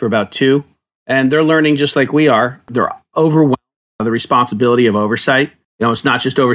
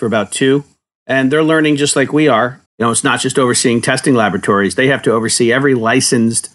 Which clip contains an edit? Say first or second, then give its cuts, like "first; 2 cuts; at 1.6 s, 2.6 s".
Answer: second; 1 cut; at 2.7 s